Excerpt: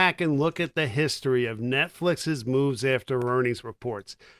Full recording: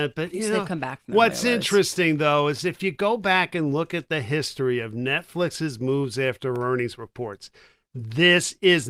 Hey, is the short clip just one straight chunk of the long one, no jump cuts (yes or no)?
yes